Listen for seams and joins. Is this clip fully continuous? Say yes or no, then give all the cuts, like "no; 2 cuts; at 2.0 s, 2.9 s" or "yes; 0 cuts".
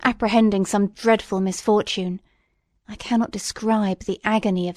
no; 1 cut; at 2.8 s